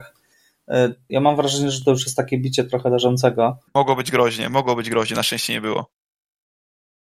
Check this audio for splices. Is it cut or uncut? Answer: cut